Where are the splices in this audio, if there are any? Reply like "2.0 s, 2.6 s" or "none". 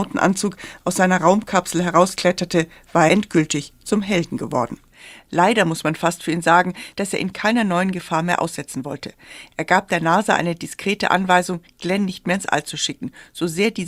3.1 s, 6.9 s